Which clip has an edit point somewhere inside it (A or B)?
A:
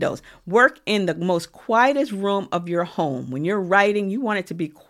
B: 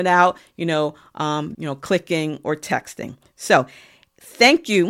B